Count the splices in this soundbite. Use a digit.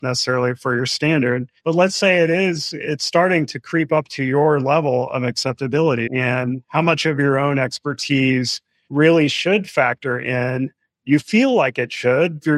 1